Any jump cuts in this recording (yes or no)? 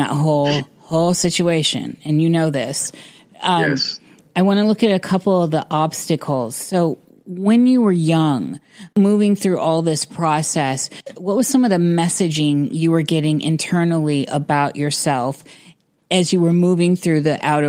no